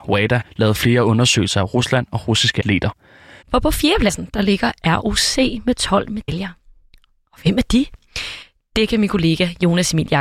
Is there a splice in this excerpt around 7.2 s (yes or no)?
no